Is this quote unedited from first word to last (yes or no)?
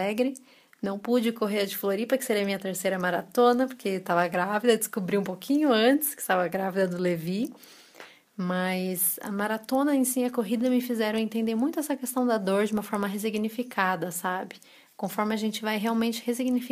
yes